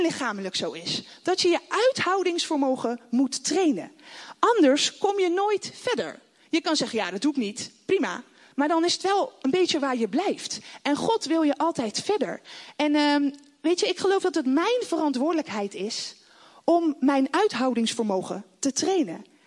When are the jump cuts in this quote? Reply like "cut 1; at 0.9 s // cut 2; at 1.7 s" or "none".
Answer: none